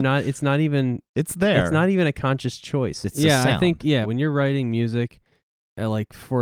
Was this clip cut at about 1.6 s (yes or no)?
no